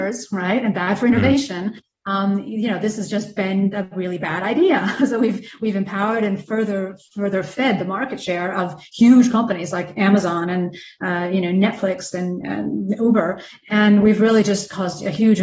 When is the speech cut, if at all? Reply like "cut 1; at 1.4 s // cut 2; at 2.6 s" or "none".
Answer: none